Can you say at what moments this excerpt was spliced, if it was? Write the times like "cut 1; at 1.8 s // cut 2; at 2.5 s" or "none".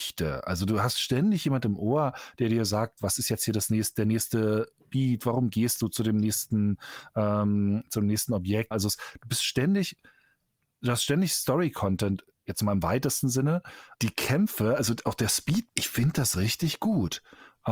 cut 1; at 8.7 s // cut 2; at 13.9 s // cut 3; at 15.7 s